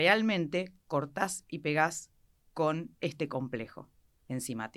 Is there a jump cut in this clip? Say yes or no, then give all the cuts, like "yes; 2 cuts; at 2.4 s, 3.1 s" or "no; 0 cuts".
no; 0 cuts